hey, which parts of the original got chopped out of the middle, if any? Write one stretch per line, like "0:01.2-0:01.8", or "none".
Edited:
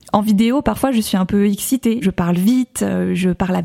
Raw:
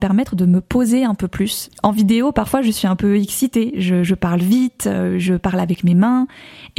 0:03.7-0:04.1

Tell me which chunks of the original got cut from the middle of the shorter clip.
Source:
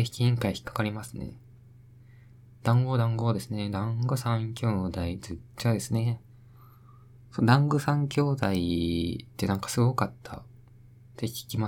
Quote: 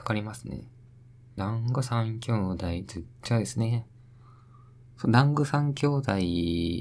0:02.1-0:03.7

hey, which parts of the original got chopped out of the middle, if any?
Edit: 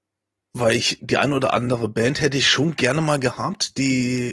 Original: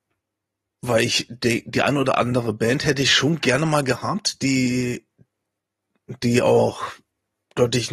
0:01.3-0:01.6

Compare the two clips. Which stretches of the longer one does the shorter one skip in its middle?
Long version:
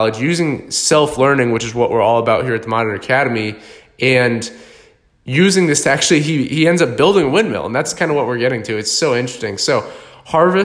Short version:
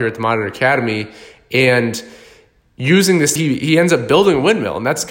0:05.8-0:06.2

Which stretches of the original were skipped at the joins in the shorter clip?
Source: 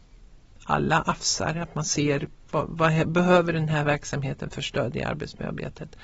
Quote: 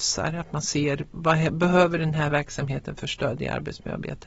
0:02.4-0:02.7

